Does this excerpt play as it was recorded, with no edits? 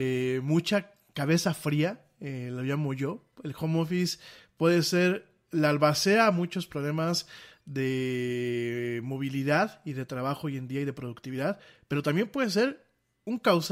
yes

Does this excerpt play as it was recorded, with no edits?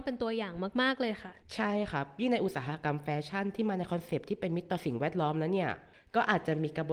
no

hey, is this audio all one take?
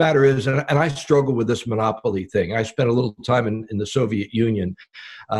yes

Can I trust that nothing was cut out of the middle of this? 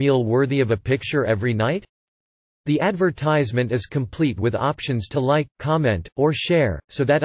yes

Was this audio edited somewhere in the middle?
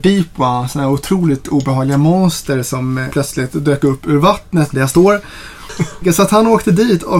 yes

